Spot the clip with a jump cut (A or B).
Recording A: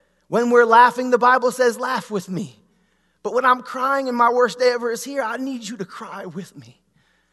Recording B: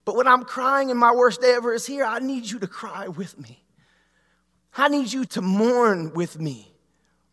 B